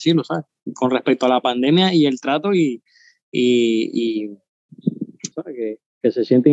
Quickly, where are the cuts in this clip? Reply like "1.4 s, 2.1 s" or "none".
5.3 s